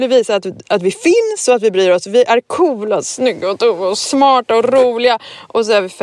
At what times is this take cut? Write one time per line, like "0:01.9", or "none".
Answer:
none